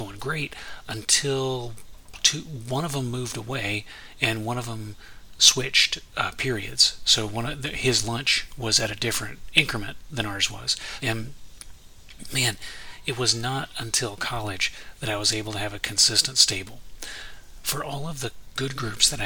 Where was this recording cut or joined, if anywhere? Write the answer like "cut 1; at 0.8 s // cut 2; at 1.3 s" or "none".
cut 1; at 11.0 s